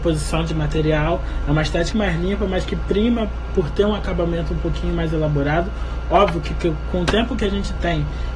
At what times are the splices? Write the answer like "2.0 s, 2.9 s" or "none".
1.9 s